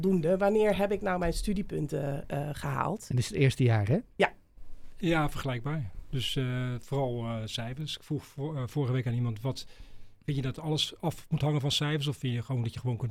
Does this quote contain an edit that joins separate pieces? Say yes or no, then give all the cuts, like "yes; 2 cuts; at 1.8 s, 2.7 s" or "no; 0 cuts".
yes; 1 cut; at 5.0 s